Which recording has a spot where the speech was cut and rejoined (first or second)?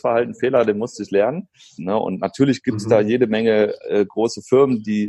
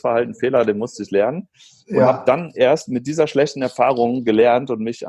first